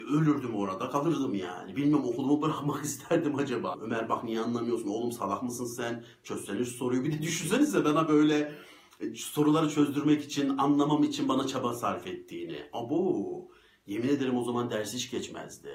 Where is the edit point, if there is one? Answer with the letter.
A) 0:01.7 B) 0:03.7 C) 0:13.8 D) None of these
B